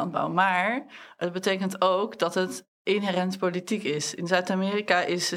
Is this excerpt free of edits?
yes; 0 cuts

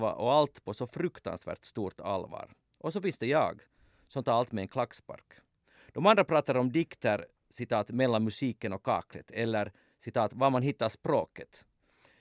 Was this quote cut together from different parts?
no; 0 cuts

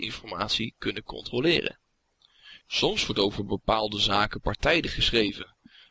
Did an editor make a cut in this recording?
yes; 1 cut; at 2.6 s

